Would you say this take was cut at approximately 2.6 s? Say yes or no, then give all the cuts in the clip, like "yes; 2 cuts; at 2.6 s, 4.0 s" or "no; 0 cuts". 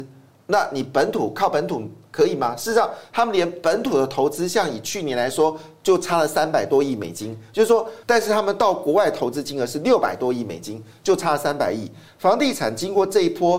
no; 2 cuts; at 8.0 s, 12.1 s